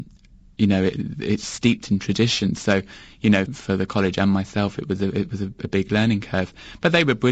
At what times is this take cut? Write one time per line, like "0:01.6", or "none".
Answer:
0:03.5